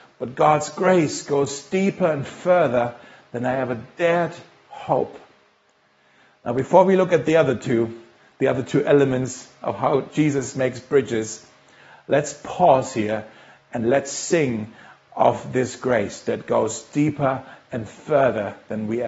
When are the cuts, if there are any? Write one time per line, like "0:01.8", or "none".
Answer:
none

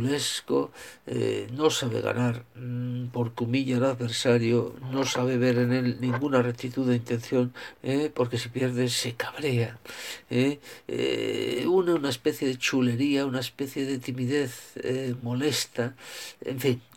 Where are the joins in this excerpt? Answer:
0:07.7

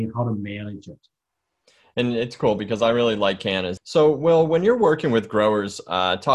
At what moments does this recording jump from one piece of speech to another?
0:03.8

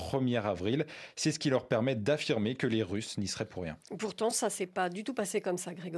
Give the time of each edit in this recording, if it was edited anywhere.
none

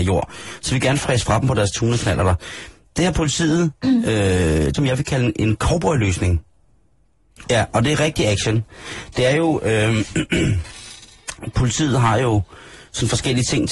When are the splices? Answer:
0:04.7
0:07.4

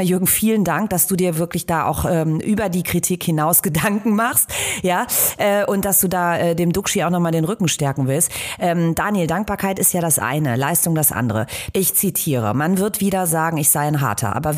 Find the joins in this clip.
0:11.7

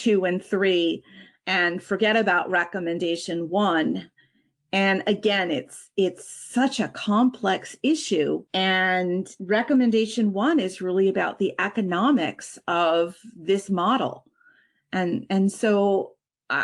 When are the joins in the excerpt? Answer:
none

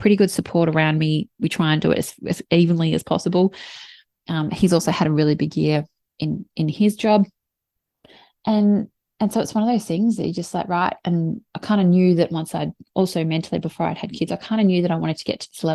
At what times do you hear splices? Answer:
0:01.3

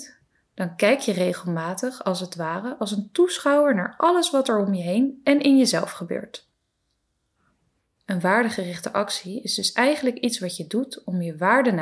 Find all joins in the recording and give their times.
0:07.9

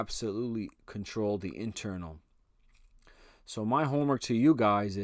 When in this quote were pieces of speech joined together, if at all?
none

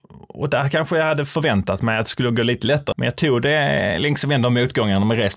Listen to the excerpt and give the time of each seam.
0:02.9

